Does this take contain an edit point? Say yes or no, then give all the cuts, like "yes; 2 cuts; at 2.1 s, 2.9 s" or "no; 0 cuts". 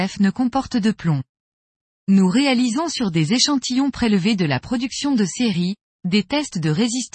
yes; 1 cut; at 2.0 s